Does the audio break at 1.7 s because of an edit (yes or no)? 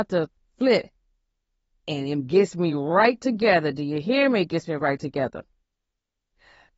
yes